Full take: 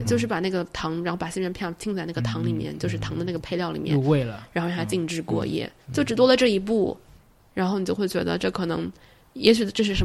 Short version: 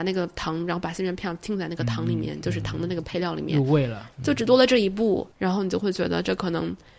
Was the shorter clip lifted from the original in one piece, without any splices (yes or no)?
no